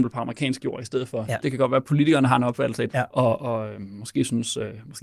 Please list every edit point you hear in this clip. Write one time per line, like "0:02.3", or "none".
0:01.4
0:02.9